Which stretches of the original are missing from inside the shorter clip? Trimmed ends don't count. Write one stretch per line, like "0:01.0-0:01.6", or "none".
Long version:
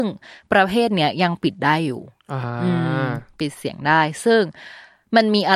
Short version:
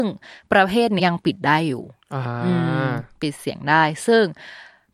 0:01.0-0:01.2